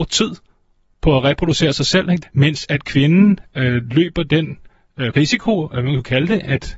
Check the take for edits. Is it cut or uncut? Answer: cut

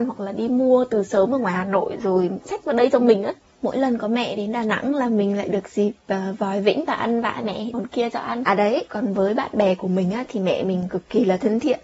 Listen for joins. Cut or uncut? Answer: cut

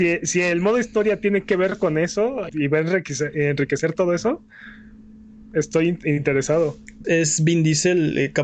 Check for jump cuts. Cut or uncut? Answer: cut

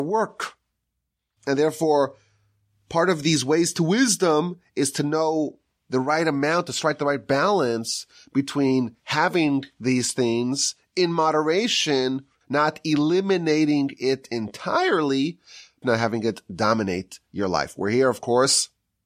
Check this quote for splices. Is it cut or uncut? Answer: cut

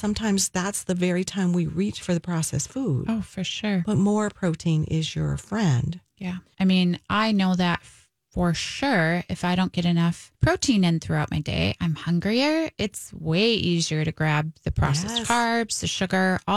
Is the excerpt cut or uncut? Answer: cut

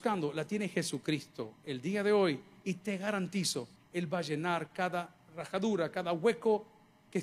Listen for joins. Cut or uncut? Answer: cut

